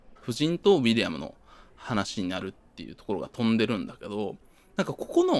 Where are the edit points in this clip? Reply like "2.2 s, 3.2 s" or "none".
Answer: none